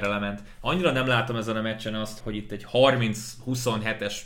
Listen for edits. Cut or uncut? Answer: cut